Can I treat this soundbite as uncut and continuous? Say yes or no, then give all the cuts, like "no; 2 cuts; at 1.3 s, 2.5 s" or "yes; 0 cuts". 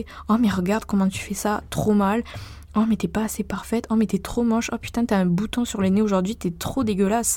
yes; 0 cuts